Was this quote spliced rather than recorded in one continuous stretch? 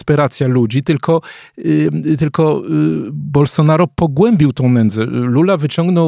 no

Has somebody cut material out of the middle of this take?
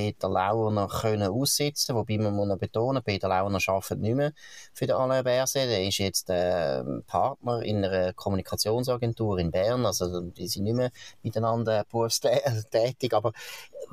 no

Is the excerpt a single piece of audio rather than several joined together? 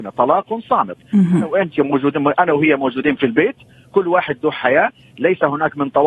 yes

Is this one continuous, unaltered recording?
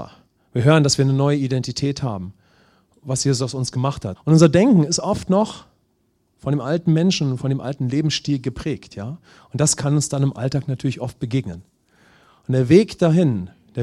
no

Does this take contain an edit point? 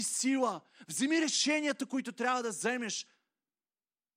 no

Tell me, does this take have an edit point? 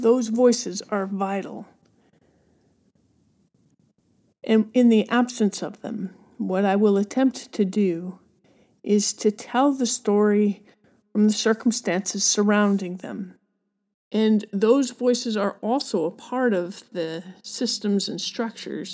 yes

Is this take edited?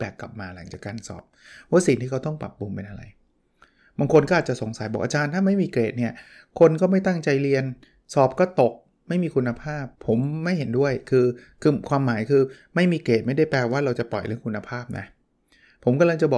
yes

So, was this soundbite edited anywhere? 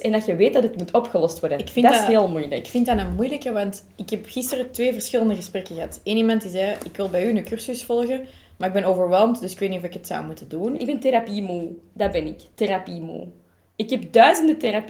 yes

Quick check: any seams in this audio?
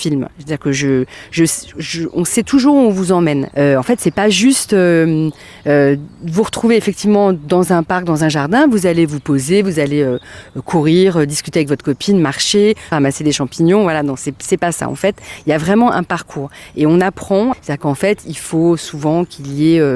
yes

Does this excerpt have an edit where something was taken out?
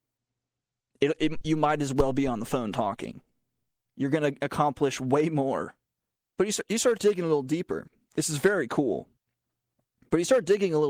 yes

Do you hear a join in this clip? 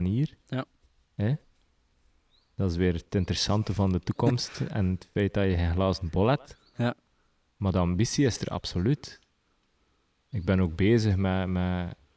no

